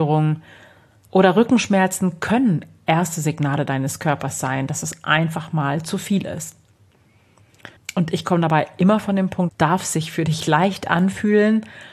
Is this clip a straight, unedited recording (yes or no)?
no